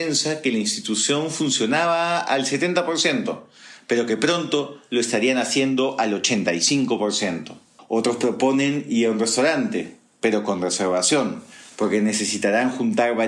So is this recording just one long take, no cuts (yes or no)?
no